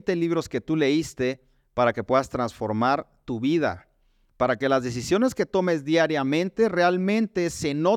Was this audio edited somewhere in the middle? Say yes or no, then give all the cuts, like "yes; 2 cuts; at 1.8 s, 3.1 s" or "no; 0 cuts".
no; 0 cuts